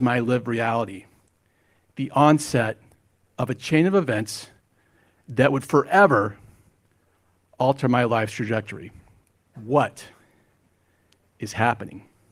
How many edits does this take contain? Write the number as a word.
one